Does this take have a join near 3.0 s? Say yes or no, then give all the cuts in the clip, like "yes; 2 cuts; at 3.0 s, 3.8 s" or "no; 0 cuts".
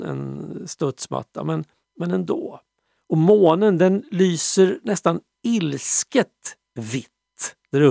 yes; 1 cut; at 3.0 s